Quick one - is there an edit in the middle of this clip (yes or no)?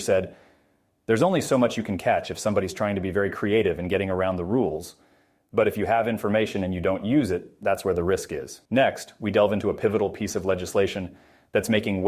yes